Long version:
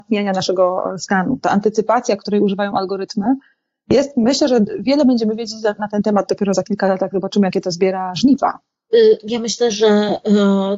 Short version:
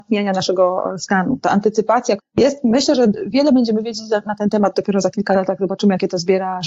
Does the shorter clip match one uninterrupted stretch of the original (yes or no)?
no